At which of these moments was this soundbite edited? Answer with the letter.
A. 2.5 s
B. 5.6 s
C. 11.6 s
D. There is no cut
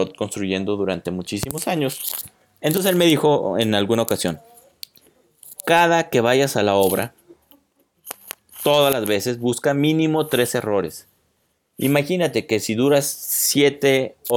C